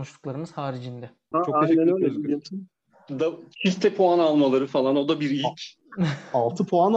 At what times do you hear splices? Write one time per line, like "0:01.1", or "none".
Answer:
0:01.3